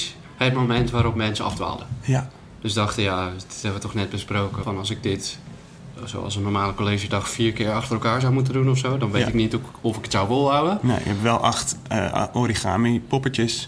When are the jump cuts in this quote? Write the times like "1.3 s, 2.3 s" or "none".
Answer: 4.6 s